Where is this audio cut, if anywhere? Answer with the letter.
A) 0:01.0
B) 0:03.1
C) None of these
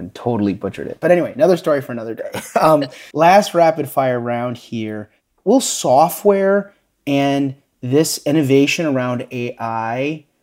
B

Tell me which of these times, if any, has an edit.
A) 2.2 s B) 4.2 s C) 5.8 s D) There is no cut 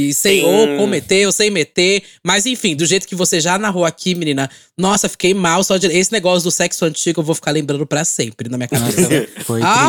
D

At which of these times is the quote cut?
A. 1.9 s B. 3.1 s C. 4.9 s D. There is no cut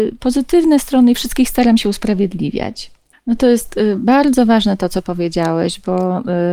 B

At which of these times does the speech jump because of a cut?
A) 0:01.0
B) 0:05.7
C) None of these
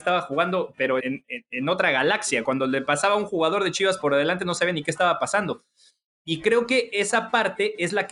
A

